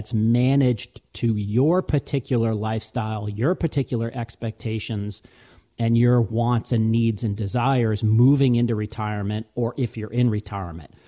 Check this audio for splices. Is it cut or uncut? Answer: uncut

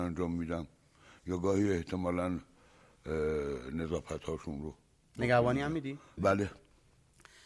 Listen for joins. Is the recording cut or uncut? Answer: cut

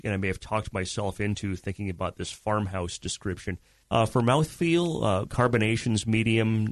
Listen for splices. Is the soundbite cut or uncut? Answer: cut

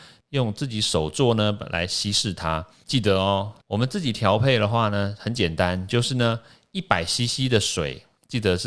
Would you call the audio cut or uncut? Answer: cut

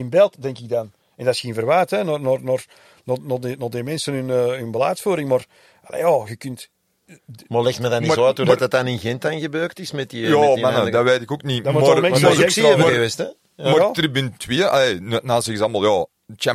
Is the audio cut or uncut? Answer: uncut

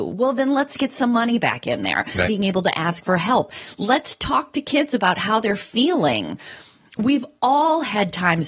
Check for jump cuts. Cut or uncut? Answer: cut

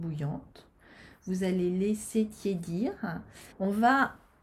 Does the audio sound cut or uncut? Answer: cut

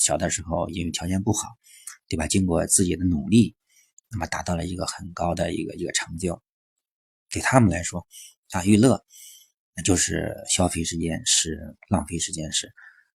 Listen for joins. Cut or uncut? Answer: uncut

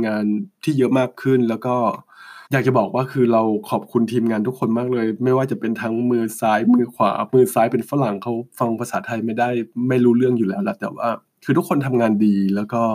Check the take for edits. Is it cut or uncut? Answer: cut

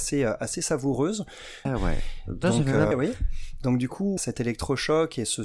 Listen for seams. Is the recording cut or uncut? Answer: cut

